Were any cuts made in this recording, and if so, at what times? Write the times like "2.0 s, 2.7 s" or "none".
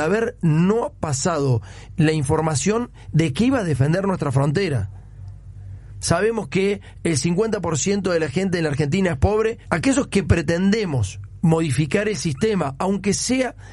6.0 s, 9.6 s